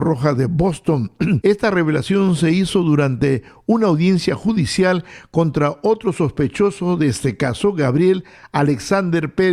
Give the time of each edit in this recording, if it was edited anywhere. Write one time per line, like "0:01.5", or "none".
0:01.4